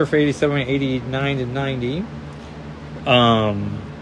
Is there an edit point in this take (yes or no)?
yes